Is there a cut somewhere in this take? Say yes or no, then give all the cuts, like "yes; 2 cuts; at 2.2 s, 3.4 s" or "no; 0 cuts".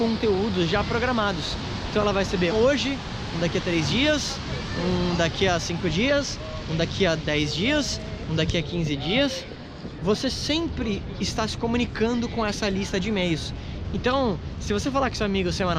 yes; 3 cuts; at 2.5 s, 10.0 s, 13.8 s